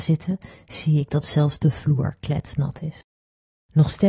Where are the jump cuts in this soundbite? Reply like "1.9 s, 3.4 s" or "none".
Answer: none